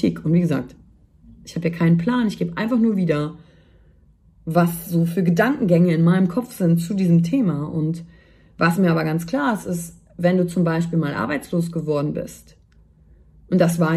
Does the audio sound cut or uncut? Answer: uncut